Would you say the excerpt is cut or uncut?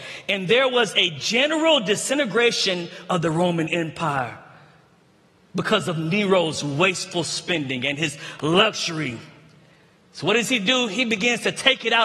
uncut